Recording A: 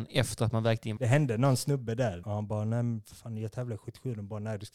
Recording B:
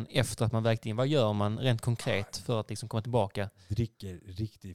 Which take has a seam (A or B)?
A